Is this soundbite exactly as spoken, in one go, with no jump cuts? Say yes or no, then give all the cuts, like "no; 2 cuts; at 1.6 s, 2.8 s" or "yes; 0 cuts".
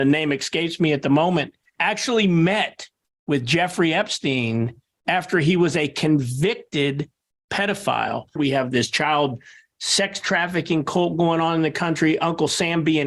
no; 2 cuts; at 1.8 s, 8.4 s